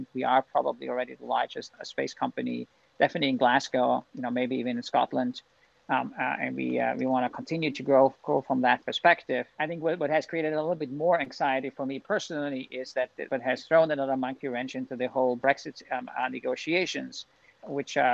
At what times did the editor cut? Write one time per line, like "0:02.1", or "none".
0:13.3